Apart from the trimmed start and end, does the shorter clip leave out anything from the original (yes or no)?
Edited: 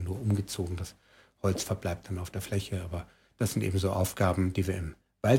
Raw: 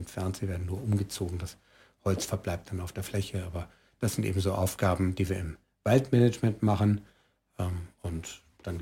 no